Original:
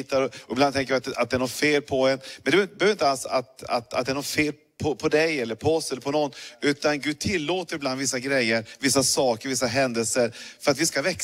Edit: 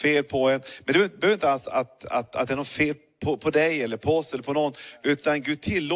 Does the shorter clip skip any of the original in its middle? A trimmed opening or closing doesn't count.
no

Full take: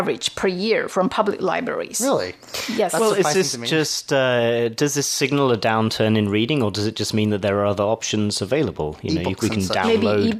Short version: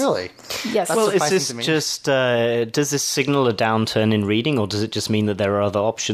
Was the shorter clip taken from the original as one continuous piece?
yes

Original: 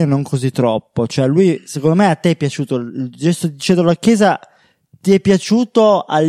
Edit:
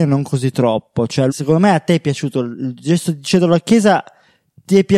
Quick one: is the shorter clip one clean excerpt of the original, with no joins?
no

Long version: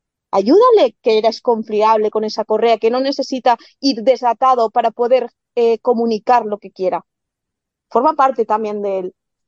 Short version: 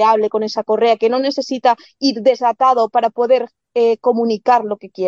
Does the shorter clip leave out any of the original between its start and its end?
no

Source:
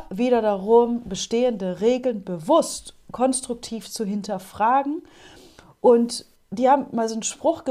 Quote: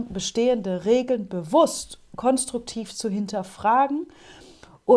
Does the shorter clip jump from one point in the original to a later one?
no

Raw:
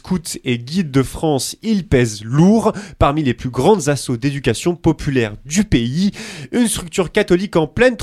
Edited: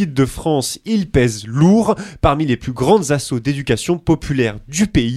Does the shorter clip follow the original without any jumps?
yes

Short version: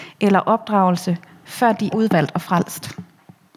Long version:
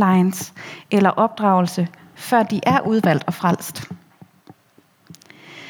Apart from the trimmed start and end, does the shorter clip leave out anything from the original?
yes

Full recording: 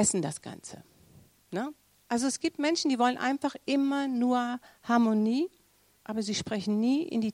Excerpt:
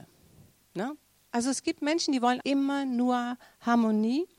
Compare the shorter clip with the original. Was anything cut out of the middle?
yes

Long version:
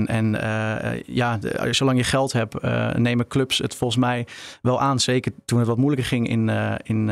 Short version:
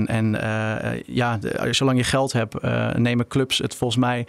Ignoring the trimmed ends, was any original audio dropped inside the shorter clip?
no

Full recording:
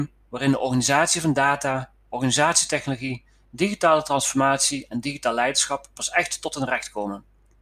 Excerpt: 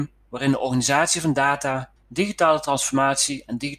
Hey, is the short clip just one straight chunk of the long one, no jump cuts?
no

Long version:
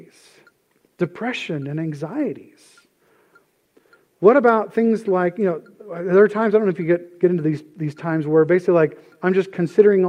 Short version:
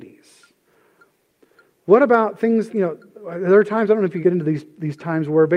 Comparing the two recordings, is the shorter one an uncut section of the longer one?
no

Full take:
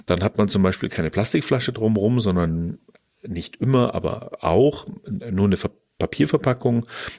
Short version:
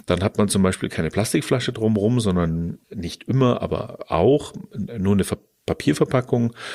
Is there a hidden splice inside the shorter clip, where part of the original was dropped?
yes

